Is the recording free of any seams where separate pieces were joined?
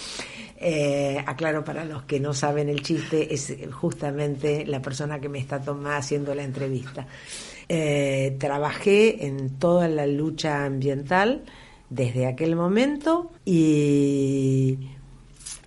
no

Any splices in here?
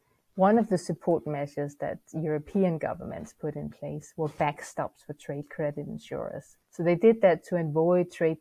yes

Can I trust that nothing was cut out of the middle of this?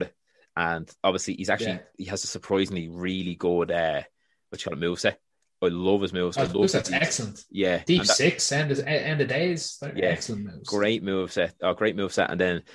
yes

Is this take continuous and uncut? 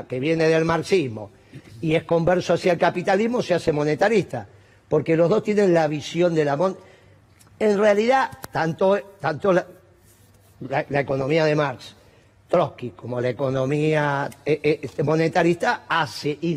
yes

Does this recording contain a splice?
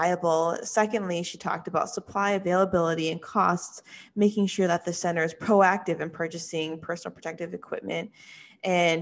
no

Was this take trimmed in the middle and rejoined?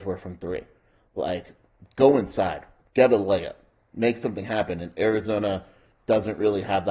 no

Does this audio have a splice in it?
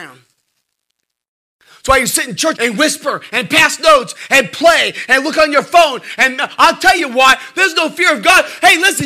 yes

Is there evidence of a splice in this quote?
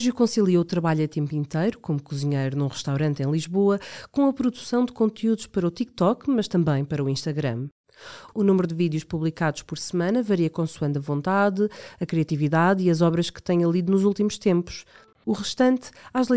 yes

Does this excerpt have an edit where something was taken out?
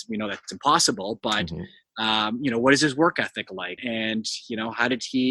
yes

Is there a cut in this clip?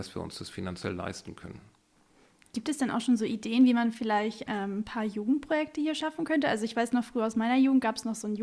no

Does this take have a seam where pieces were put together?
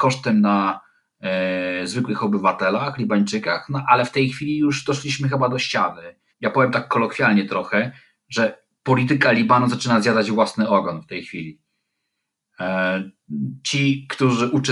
yes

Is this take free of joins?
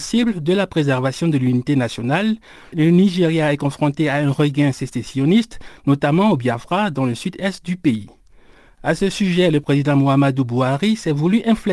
yes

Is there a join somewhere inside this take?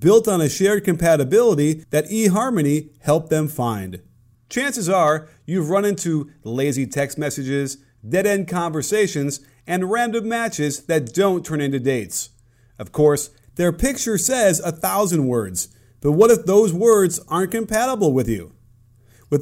yes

